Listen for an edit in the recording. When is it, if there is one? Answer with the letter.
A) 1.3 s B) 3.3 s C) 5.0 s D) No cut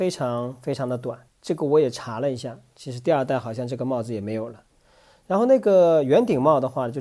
D